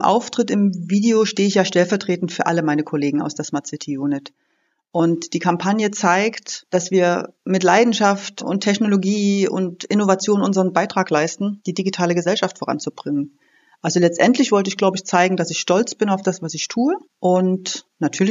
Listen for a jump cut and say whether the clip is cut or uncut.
uncut